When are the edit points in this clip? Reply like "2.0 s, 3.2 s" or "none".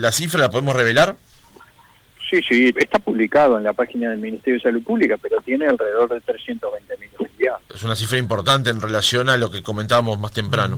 2.7 s, 7.6 s